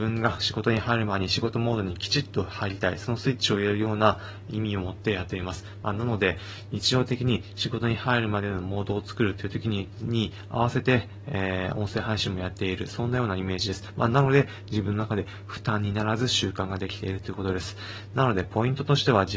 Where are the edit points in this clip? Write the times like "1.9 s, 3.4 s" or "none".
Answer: none